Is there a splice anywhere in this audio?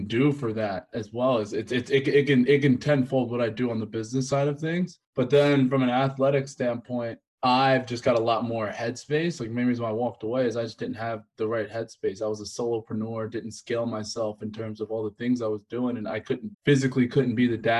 no; 0 cuts

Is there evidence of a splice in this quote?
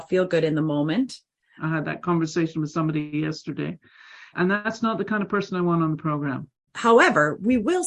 yes; 3 cuts; at 1.6 s, 4.3 s, 6.7 s

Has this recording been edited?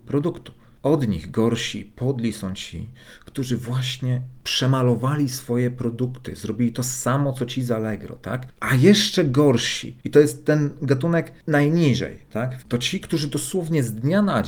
yes; 2 cuts; at 8.5 s, 12.6 s

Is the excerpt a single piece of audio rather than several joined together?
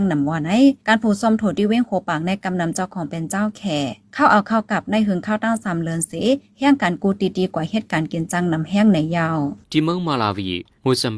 no; 1 cut; at 9.6 s

